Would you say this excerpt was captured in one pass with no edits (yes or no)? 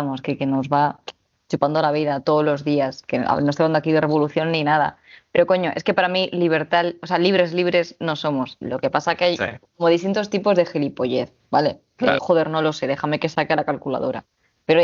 no